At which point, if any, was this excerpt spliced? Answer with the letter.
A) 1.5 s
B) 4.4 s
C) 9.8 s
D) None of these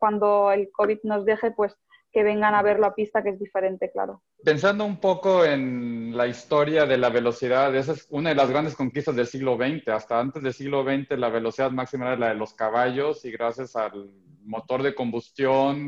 D